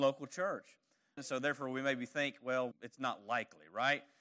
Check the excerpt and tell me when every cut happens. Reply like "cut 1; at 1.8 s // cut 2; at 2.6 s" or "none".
cut 1; at 1.2 s // cut 2; at 2.7 s